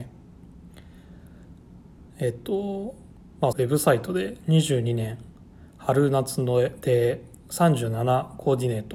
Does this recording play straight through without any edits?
no; 2 cuts; at 2.1 s, 3.5 s

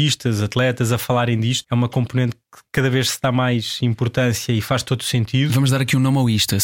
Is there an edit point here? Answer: yes; 1 cut; at 1.6 s

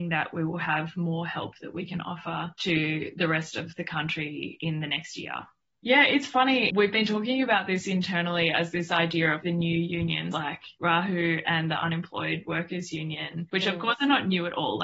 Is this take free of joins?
yes; 0 cuts

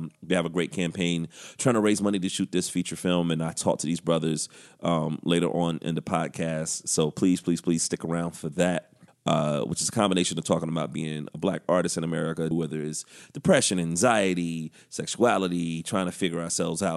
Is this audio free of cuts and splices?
no; 2 cuts; at 9.1 s, 12.5 s

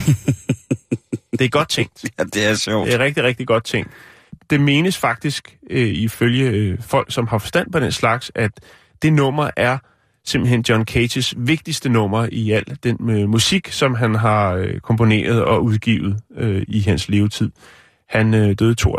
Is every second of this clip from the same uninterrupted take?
yes; 0 cuts

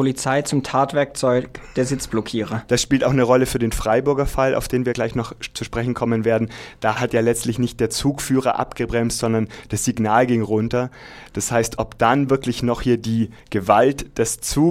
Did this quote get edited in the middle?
yes; 1 cut; at 2.7 s

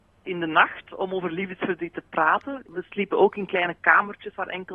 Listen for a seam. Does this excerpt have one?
no; 0 cuts

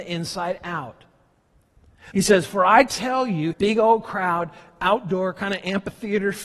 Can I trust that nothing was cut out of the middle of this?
no; 2 cuts; at 2.1 s, 3.5 s

